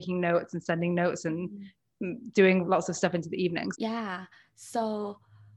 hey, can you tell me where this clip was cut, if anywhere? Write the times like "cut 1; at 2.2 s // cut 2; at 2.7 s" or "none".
cut 1; at 2.6 s // cut 2; at 3.7 s